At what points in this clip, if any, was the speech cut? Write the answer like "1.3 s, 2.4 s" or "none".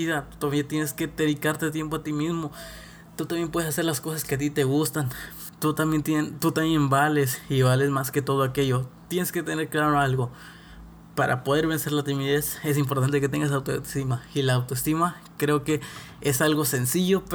none